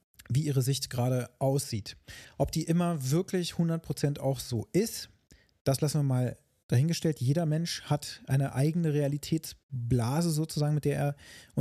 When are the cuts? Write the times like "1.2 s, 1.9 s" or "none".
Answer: none